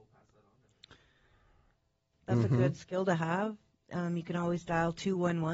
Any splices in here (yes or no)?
yes